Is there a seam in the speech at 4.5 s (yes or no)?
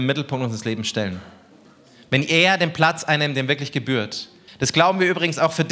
yes